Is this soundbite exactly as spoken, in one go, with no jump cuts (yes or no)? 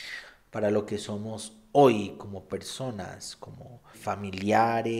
no